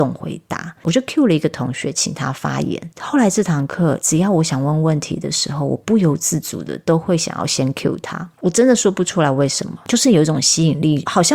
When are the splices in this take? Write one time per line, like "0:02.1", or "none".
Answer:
none